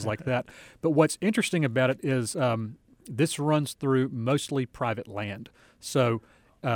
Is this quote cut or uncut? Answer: uncut